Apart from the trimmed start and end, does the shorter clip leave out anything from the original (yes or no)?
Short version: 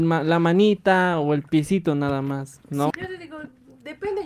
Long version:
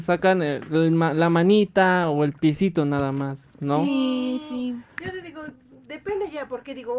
yes